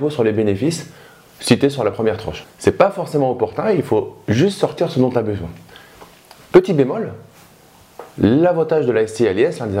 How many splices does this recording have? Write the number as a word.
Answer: one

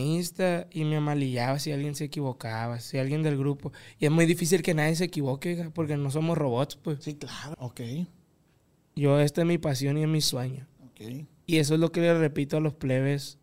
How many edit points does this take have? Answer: one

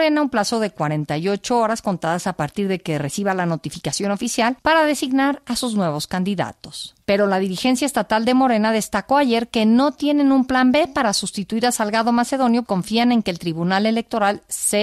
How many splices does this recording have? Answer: one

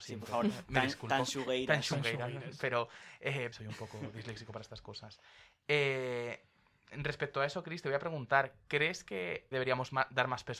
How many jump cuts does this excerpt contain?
two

